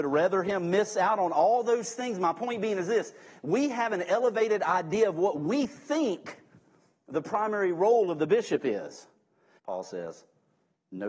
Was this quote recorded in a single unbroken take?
no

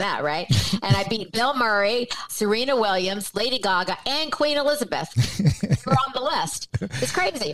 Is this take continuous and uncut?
no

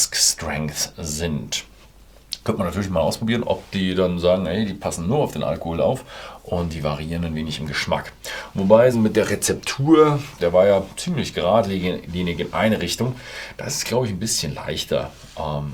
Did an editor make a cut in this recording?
yes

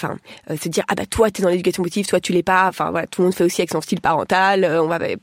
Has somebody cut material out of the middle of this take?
no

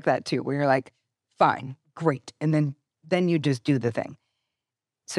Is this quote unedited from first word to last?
yes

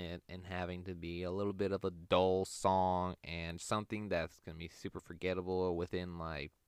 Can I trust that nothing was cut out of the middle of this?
no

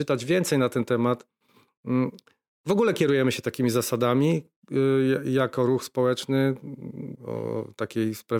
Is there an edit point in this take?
yes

